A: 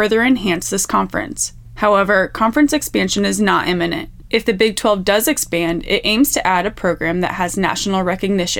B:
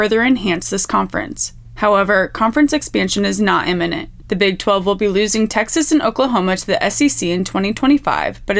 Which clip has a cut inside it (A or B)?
B